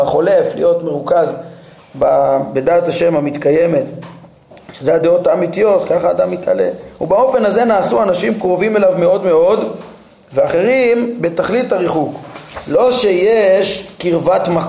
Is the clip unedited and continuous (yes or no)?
yes